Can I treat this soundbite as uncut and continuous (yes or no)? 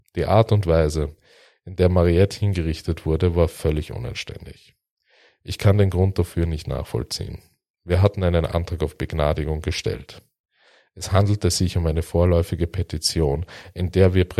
yes